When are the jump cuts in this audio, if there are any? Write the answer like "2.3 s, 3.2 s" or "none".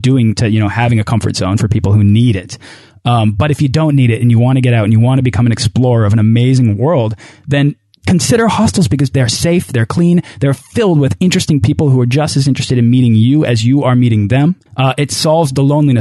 none